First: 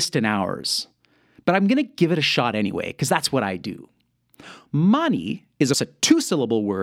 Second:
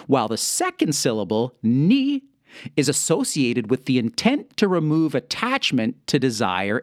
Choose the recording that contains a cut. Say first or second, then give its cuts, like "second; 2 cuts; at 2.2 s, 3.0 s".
first; 2 cuts; at 4.7 s, 5.7 s